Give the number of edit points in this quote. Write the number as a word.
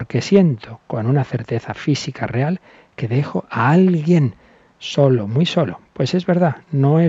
zero